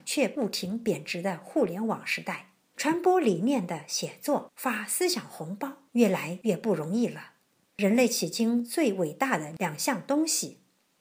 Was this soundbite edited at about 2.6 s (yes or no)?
no